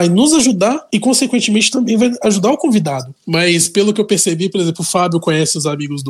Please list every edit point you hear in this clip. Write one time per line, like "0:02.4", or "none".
0:03.2